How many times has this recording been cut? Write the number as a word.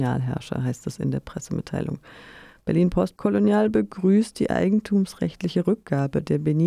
zero